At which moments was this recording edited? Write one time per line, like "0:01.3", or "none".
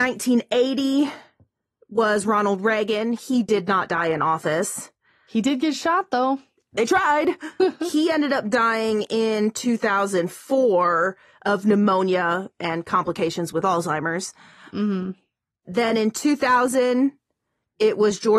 0:07.6